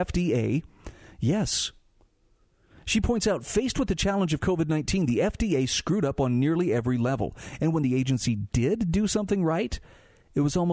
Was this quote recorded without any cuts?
yes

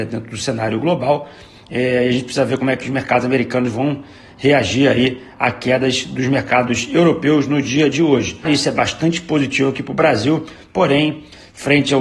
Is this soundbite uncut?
no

